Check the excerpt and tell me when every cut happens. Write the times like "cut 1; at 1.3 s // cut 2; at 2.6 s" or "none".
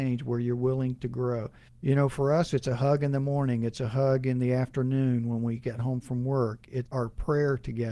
cut 1; at 1.7 s // cut 2; at 6.9 s